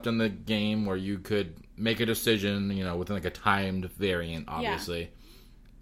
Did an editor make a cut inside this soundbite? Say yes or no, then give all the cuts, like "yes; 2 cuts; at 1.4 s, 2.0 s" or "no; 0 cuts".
no; 0 cuts